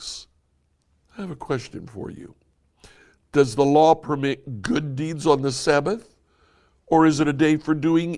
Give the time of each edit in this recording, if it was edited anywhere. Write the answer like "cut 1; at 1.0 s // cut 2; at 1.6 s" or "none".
none